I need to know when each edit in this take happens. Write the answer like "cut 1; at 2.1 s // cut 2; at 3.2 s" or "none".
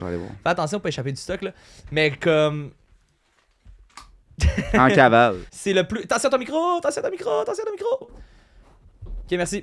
cut 1; at 5.5 s // cut 2; at 8.0 s

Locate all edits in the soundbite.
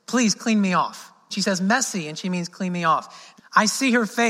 cut 1; at 1.3 s // cut 2; at 3.4 s

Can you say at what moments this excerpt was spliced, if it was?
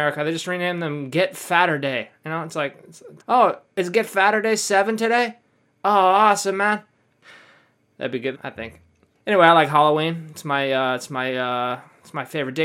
cut 1; at 3.2 s // cut 2; at 7.1 s // cut 3; at 8.3 s

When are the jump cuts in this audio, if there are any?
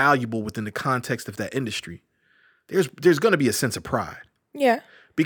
none

